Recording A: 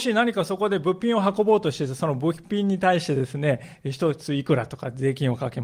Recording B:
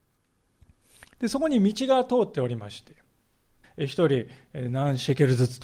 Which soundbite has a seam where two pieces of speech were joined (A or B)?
B